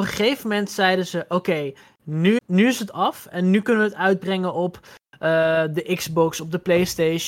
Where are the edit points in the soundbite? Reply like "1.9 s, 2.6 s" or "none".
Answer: 2.4 s